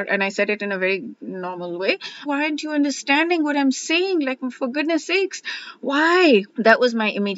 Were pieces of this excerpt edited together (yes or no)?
yes